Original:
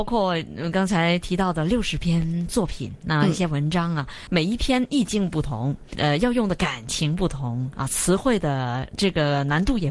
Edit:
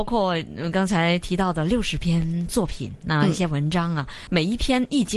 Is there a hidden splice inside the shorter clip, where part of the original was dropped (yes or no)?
no